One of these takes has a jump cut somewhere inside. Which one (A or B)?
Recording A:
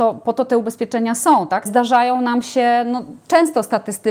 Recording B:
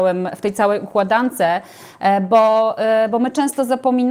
A